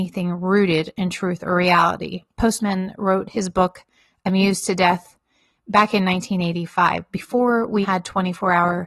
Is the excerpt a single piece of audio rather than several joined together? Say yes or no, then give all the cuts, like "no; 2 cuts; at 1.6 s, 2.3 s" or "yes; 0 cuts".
no; 1 cut; at 7.8 s